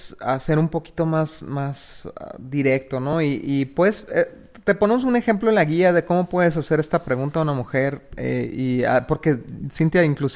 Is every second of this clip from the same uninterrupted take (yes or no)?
yes